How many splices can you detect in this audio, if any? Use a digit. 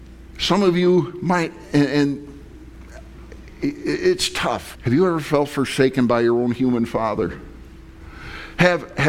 1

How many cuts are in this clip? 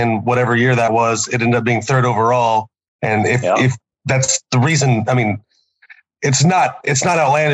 1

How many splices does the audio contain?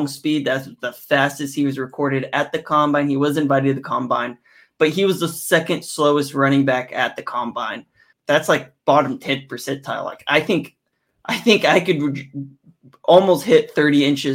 1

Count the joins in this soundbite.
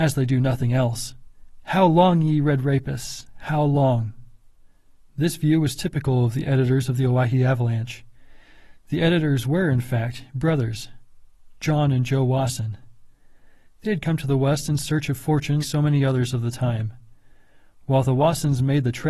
1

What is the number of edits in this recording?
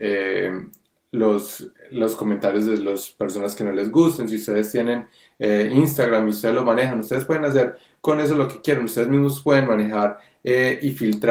0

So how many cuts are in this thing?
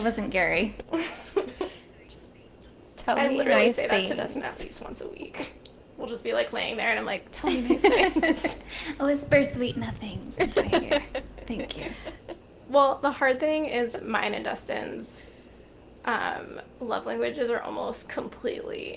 0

